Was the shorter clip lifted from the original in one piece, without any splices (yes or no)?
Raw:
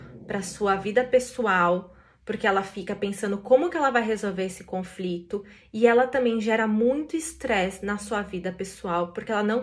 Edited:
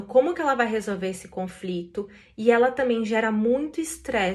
yes